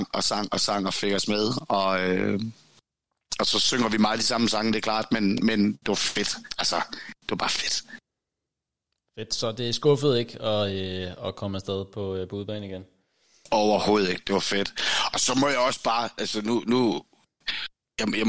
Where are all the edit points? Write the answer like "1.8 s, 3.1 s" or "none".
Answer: none